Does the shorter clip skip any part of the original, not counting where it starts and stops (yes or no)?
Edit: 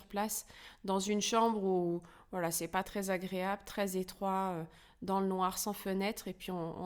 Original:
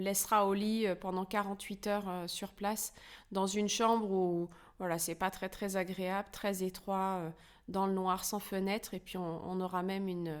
yes